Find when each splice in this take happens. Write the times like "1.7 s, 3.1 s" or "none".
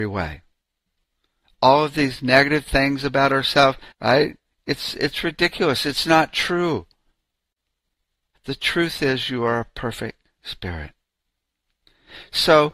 3.9 s, 8.3 s